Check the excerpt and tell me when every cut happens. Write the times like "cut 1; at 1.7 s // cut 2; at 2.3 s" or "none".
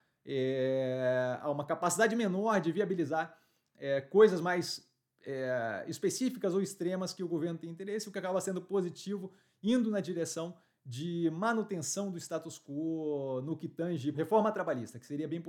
cut 1; at 14.1 s

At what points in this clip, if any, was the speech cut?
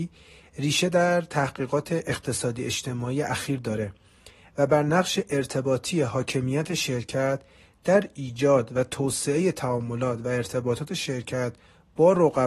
none

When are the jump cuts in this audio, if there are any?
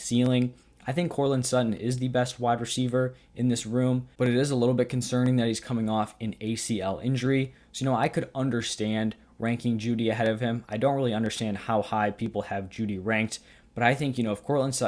none

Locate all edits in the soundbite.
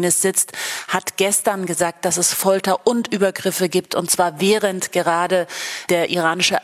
none

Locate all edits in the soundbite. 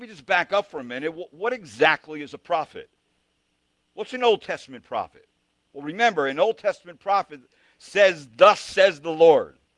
none

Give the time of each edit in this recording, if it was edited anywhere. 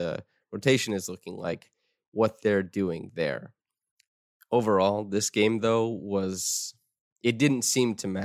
none

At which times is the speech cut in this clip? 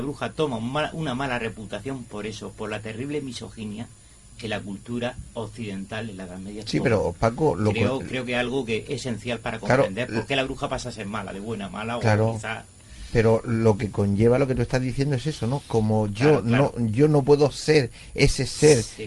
none

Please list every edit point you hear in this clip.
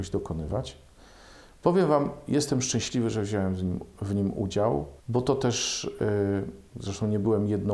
cut 1; at 5.0 s

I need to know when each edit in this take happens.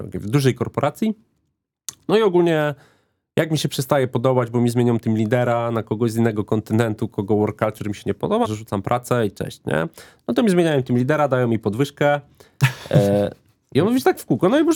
cut 1; at 8.4 s

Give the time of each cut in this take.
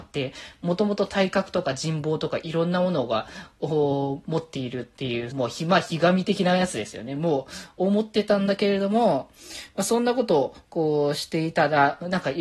cut 1; at 5.3 s

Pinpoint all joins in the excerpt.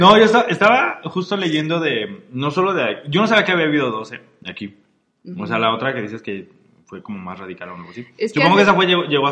none

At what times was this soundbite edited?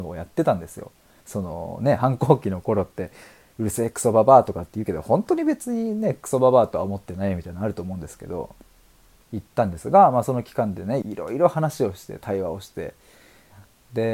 cut 1; at 1.2 s // cut 2; at 9.2 s // cut 3; at 11.0 s

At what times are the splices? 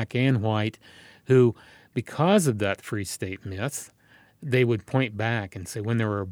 none

